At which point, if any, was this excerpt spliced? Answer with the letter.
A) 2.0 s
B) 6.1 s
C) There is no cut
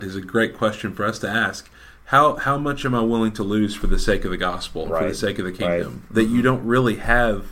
B